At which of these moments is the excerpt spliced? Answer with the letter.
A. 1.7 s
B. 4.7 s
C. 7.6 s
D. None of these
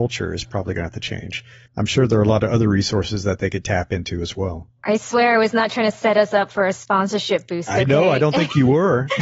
A